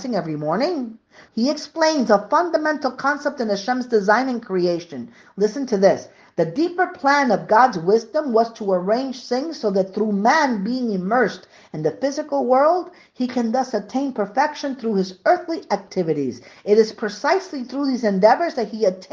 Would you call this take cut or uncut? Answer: cut